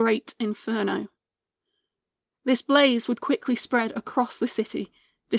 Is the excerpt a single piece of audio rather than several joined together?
yes; 0 cuts

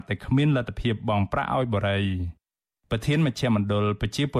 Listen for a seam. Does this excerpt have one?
no; 0 cuts

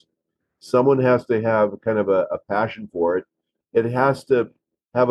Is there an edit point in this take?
yes; 1 cut; at 3.6 s

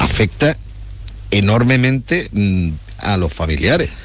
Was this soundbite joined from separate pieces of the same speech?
yes; 1 cut; at 3.0 s

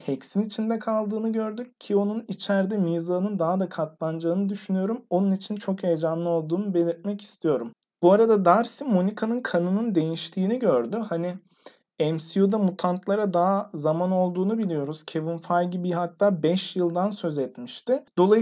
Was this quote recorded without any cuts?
yes; 0 cuts

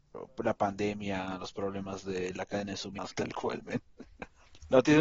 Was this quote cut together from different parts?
yes; 1 cut; at 3.1 s

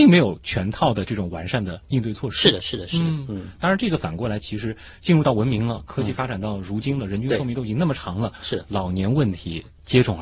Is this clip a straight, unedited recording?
yes; 0 cuts

